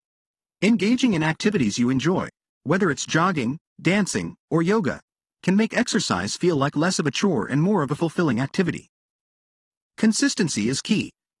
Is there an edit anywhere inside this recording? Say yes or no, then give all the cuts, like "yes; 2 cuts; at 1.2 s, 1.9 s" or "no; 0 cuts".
yes; 1 cut; at 4.4 s